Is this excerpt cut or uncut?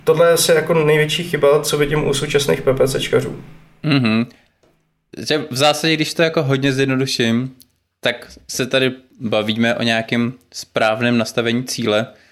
uncut